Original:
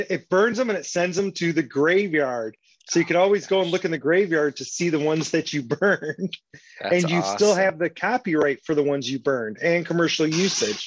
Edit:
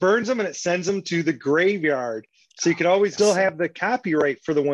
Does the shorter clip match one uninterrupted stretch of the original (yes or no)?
no